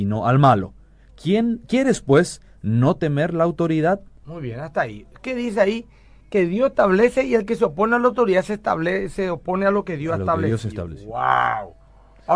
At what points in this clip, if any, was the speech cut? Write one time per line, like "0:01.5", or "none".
0:04.2